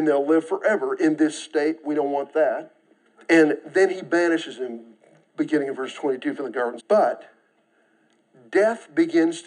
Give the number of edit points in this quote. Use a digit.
2